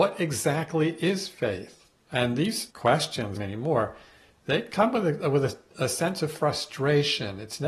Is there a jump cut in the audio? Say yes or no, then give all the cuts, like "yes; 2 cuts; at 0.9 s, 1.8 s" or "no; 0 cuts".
yes; 2 cuts; at 2.0 s, 3.4 s